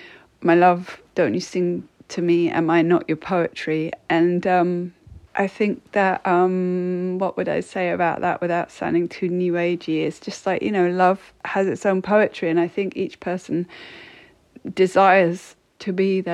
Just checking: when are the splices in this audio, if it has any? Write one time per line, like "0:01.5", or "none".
none